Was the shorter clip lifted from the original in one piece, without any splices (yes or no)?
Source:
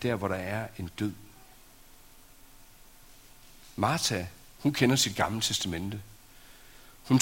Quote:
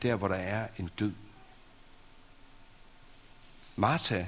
yes